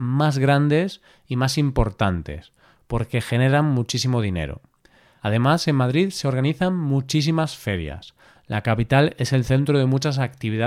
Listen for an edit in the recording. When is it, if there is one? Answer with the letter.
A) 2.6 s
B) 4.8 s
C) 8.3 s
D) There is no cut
D